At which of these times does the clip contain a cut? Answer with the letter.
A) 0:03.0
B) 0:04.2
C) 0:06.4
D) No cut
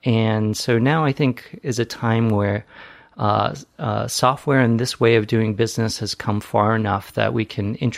D